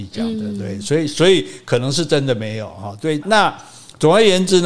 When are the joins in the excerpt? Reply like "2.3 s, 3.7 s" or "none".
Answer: 3.2 s